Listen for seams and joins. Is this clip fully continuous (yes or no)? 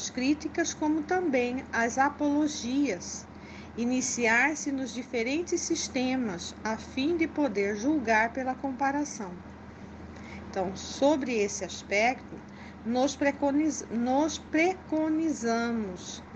yes